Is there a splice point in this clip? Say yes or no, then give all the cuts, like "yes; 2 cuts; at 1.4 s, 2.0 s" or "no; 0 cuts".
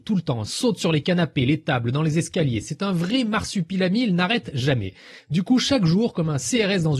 no; 0 cuts